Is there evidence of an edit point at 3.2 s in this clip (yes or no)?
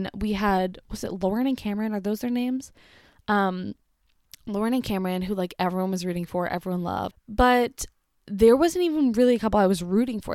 no